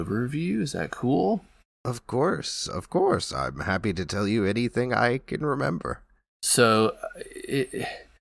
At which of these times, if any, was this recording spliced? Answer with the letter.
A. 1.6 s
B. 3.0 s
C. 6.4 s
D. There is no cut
C